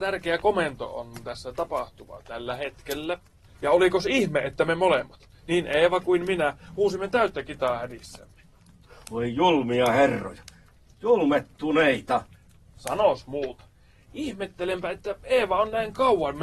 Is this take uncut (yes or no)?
no